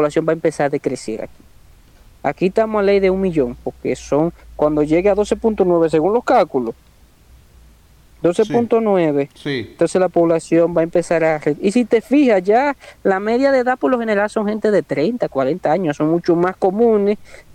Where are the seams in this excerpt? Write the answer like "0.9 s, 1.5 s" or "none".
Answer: none